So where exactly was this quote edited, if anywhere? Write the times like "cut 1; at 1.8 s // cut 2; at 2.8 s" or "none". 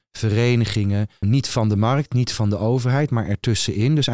cut 1; at 1.2 s

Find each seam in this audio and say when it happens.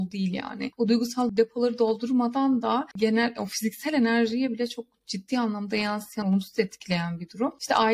cut 1; at 6.2 s

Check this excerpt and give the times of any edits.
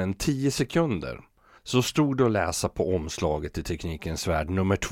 cut 1; at 1.6 s

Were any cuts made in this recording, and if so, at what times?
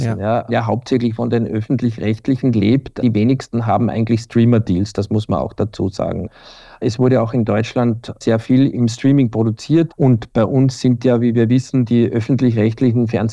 cut 1; at 9.9 s

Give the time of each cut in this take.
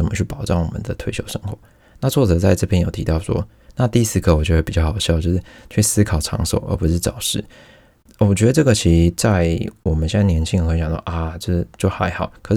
cut 1; at 3.7 s

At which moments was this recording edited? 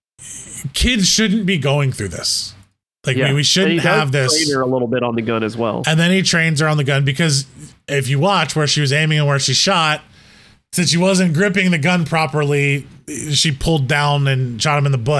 none

